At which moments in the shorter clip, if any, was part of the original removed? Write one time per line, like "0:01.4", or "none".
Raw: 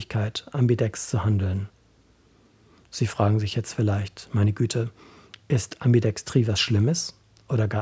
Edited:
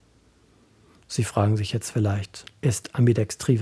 0:02.5